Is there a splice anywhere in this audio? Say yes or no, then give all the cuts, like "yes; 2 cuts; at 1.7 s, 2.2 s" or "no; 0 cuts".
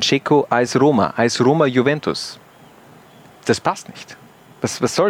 no; 0 cuts